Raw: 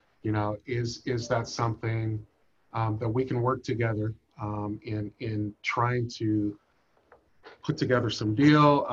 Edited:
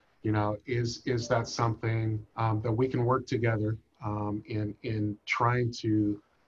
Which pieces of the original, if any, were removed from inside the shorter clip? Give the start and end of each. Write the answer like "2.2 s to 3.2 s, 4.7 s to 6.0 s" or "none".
2.3 s to 2.7 s